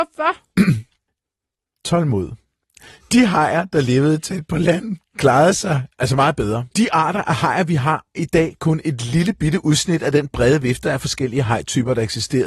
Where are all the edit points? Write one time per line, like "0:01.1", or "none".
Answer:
0:08.1